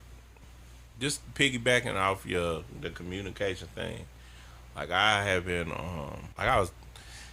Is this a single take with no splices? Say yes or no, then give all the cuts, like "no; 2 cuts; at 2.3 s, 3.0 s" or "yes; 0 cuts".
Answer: no; 1 cut; at 6.3 s